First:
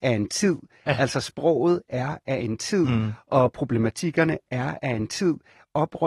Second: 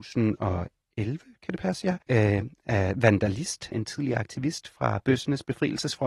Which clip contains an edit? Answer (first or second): second